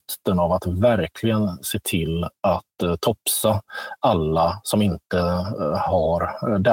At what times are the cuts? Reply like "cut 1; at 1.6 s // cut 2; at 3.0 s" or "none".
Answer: none